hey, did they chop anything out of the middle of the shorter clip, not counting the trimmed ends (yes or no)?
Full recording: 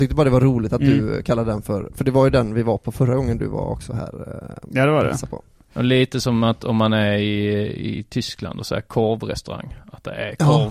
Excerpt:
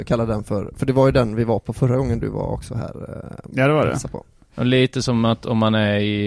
no